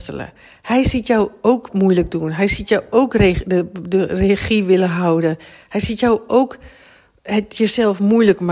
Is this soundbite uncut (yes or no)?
yes